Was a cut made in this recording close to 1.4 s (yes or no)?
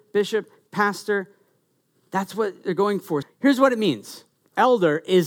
no